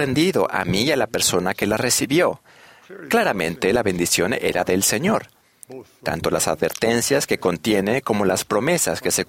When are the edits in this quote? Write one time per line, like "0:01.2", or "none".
none

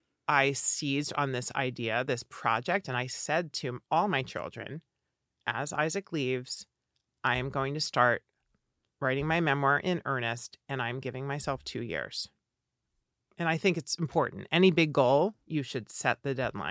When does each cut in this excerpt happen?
none

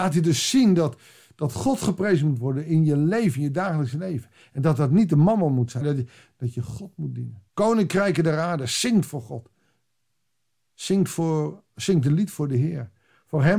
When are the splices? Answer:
0:05.8
0:07.5

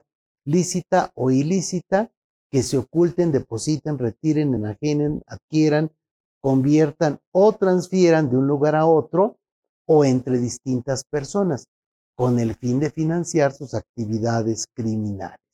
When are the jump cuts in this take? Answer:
none

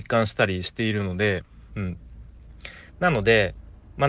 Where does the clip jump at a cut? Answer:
0:01.7

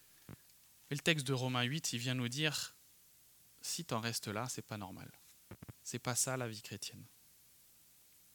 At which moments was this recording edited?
0:05.7

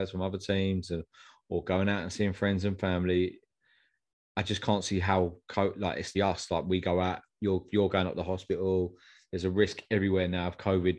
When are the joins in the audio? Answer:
0:06.1

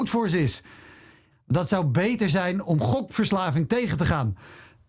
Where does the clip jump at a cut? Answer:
0:01.3

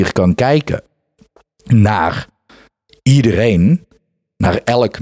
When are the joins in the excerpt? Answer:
none

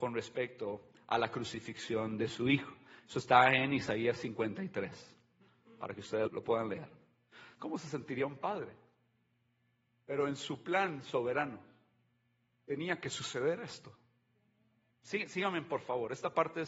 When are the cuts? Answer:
0:06.3
0:07.6
0:14.9

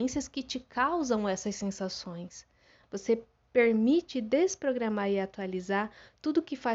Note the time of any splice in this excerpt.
0:02.8

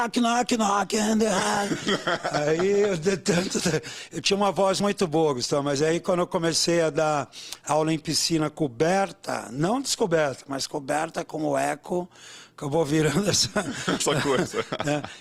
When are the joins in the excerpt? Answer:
none

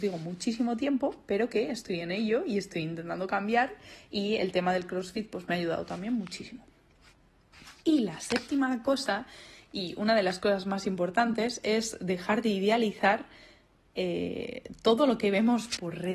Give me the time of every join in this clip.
none

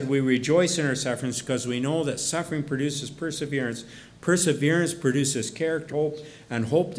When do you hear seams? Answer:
0:05.9

